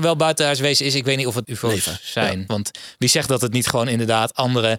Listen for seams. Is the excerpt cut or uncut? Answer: cut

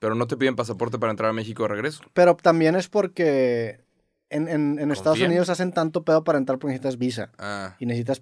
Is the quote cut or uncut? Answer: uncut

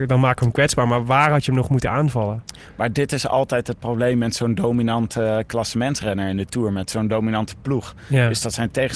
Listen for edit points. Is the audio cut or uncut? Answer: uncut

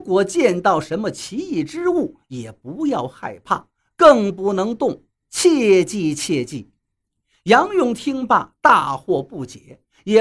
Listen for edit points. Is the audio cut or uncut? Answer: uncut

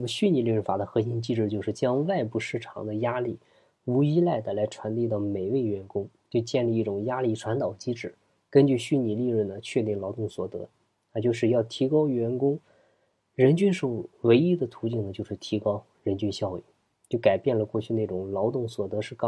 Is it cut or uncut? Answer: uncut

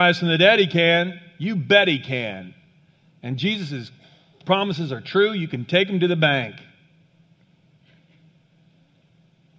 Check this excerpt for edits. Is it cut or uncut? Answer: uncut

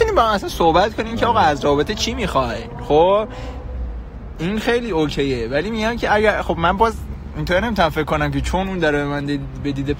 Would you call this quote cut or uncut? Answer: uncut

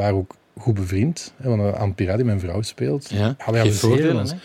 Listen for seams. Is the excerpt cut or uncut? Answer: cut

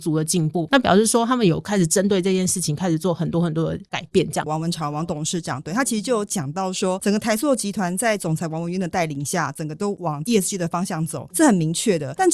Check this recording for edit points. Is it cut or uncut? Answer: cut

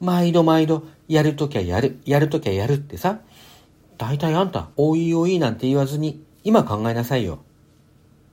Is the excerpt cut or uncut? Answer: cut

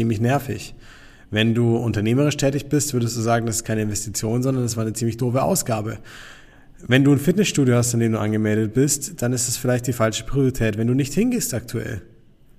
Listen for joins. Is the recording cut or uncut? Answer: uncut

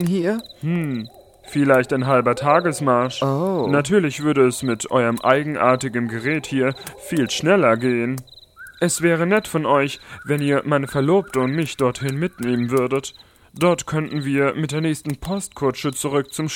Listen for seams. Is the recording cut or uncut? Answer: uncut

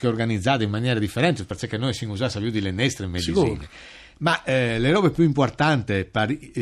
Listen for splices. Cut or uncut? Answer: uncut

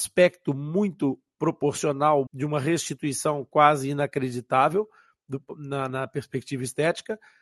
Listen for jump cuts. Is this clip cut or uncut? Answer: cut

